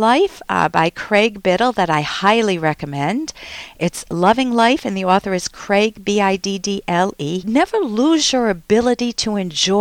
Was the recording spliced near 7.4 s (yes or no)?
yes